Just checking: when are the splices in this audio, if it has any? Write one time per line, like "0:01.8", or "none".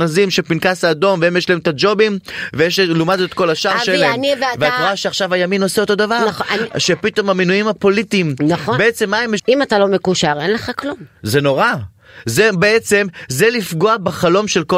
0:09.4